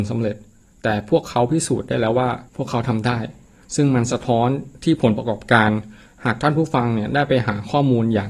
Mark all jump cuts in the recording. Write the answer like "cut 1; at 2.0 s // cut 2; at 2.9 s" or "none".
cut 1; at 2.5 s